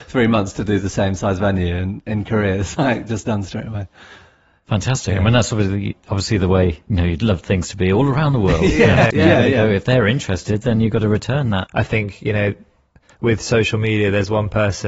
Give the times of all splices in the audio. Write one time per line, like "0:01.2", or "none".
0:09.1
0:11.7

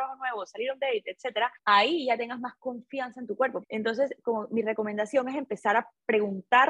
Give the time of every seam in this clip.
0:01.6
0:03.6

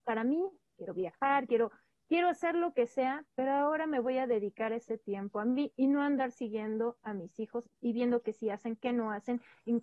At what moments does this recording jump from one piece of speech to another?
0:01.5

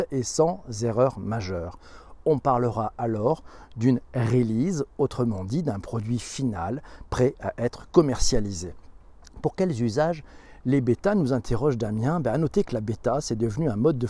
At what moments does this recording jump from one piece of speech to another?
none

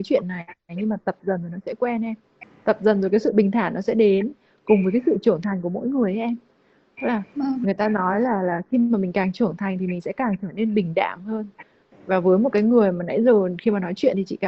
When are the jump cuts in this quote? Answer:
none

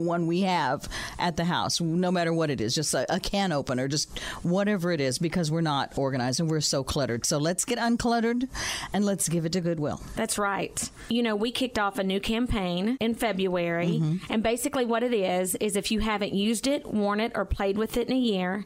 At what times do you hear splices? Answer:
0:14.3

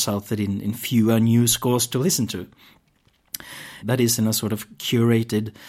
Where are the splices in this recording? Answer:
0:03.8

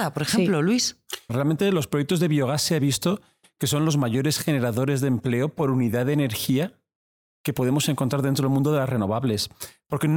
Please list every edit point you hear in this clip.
0:01.3

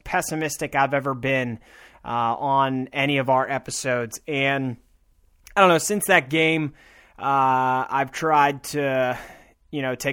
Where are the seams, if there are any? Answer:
none

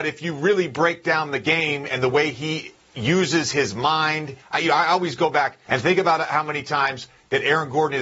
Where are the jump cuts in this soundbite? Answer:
0:04.4
0:05.6

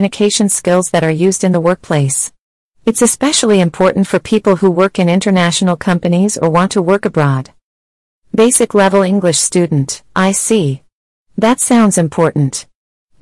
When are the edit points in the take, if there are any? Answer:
0:10.1

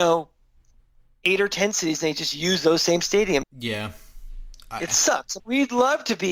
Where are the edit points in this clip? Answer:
0:03.4
0:05.4

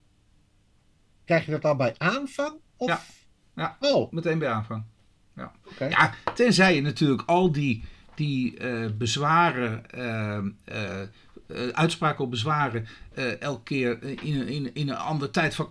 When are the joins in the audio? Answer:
none

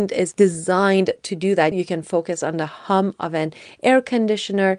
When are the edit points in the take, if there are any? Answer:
0:01.7

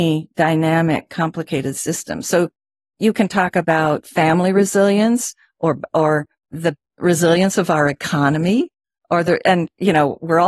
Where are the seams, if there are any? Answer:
none

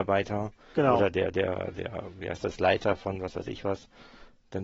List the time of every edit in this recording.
none

